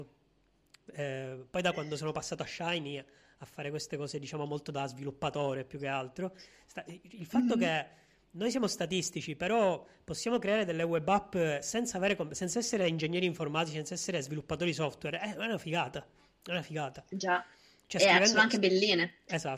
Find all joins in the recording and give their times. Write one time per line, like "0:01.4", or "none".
none